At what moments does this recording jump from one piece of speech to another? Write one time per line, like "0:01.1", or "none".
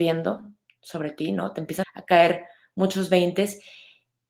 0:01.8